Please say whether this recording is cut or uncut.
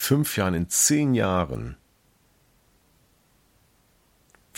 uncut